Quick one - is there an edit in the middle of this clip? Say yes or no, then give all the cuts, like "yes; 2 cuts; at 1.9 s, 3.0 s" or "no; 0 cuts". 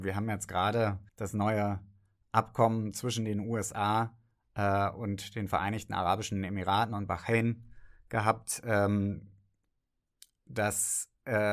yes; 1 cut; at 1.1 s